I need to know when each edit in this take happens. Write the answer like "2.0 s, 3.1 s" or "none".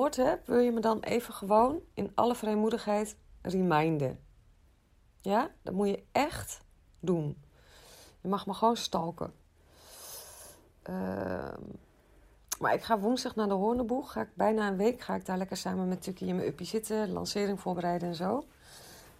none